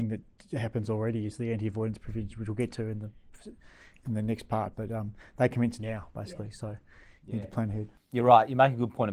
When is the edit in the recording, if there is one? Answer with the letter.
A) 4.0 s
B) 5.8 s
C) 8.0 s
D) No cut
D